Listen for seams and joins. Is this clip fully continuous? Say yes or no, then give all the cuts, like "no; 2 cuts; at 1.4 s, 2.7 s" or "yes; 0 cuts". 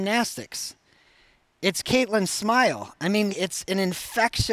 no; 1 cut; at 3.3 s